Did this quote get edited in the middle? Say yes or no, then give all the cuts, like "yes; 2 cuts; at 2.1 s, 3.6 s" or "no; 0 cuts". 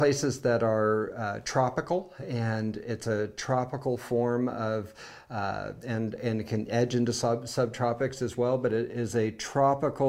no; 0 cuts